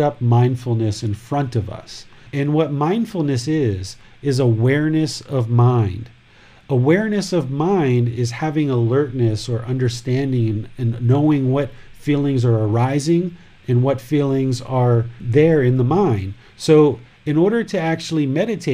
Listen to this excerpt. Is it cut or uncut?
cut